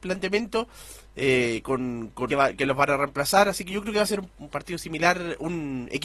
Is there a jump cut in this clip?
yes; 2 cuts; at 2.3 s, 4.3 s

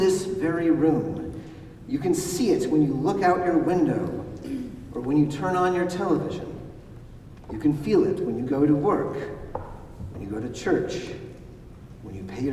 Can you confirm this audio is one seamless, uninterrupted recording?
yes; 0 cuts

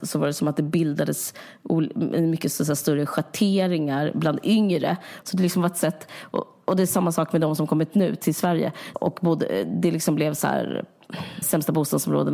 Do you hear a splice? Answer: yes; 3 cuts; at 5.2 s, 8.9 s, 11.4 s

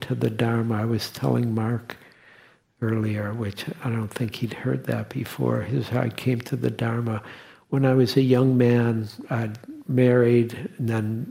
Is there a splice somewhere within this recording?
no; 0 cuts

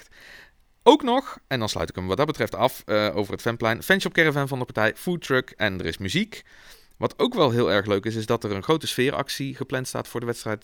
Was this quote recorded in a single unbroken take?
yes; 0 cuts

